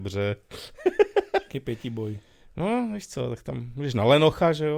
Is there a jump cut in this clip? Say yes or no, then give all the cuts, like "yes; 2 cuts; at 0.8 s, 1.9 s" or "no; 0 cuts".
no; 0 cuts